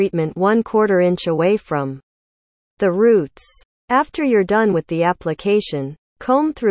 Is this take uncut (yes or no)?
yes